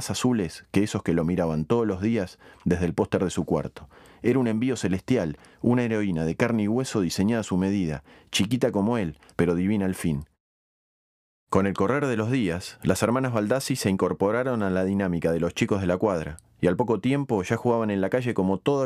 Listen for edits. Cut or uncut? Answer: cut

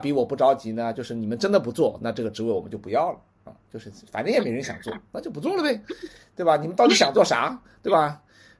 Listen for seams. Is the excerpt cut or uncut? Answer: cut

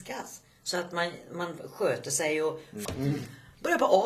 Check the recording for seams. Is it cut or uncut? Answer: cut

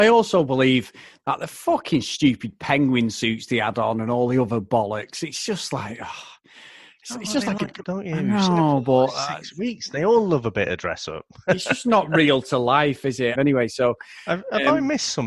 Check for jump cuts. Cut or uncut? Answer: cut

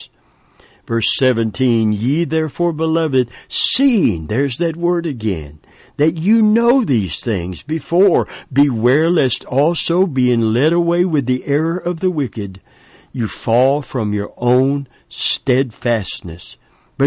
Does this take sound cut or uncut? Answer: uncut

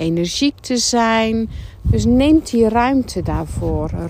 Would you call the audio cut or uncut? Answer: cut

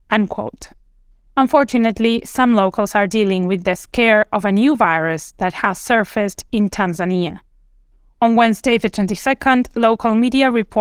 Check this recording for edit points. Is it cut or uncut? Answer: uncut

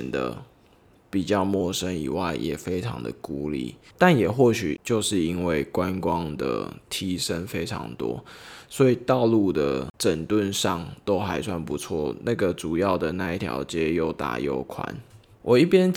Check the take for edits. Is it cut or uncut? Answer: cut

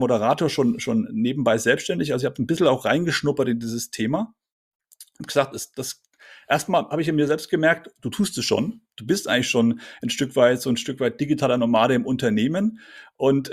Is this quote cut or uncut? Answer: uncut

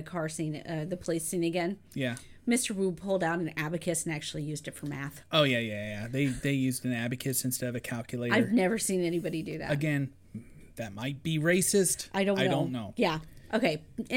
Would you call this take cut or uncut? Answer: uncut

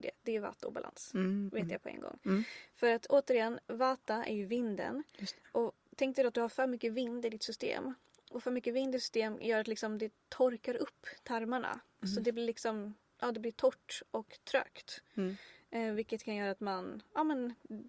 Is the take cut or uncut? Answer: uncut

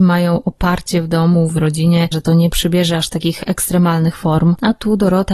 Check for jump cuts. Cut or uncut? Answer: cut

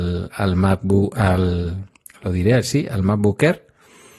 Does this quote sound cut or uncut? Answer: uncut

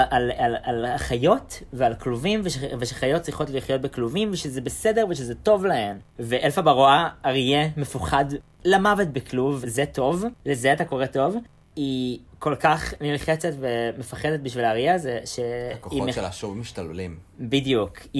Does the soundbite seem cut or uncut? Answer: cut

